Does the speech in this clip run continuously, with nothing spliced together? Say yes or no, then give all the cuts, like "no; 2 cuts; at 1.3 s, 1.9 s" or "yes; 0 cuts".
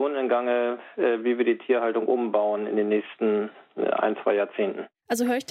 yes; 0 cuts